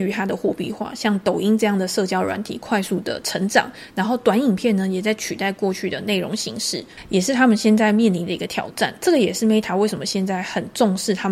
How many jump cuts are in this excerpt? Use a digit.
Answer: 0